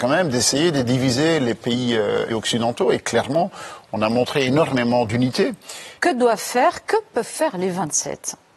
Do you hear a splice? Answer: yes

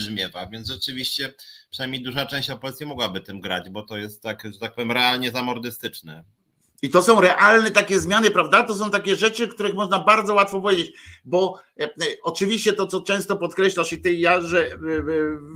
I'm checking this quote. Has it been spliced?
no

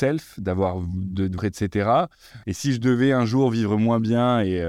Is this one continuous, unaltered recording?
no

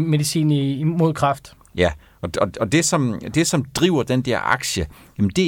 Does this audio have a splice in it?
no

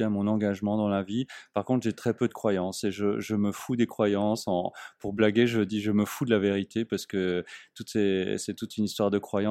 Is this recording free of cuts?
yes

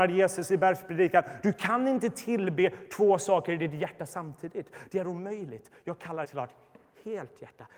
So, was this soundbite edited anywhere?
yes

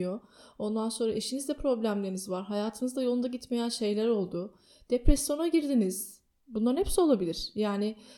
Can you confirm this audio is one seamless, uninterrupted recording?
yes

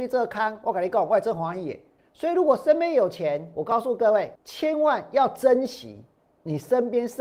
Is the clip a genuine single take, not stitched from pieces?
no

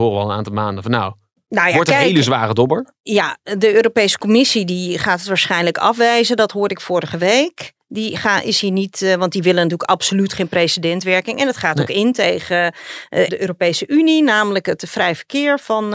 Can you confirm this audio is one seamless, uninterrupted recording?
no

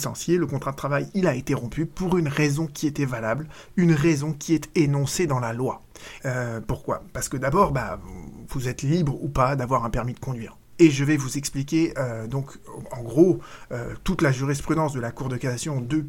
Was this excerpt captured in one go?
no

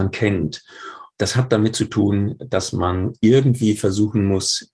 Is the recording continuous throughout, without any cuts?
no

